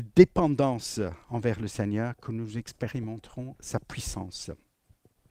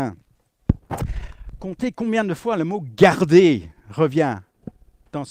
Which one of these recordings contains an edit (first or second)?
first